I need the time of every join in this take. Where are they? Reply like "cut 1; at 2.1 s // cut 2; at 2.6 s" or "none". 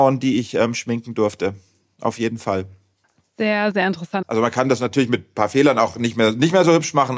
cut 1; at 4.2 s